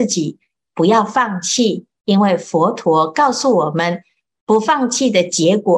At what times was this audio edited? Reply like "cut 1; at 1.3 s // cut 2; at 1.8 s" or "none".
cut 1; at 4.3 s